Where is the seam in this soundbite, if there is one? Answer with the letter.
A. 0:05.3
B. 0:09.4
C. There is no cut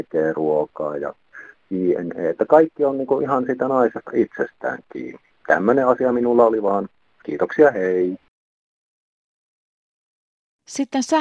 A